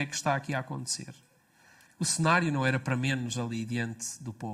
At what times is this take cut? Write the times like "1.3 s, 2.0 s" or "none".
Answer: 1.9 s